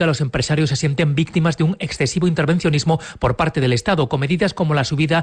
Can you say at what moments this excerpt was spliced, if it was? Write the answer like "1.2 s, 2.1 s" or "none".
none